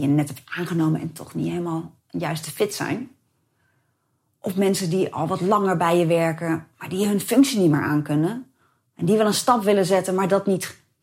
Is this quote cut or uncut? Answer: uncut